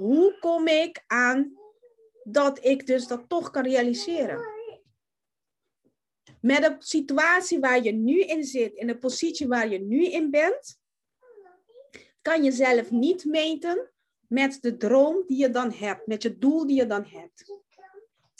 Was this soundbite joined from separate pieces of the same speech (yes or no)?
no